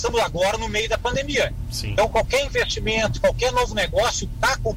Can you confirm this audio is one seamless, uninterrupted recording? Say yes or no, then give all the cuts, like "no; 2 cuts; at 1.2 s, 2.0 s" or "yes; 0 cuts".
yes; 0 cuts